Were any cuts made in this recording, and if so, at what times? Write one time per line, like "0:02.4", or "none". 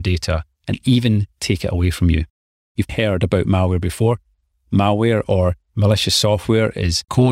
0:02.9